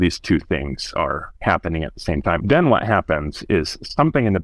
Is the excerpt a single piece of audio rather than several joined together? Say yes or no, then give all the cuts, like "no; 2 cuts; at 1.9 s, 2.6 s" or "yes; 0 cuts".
no; 1 cut; at 2.4 s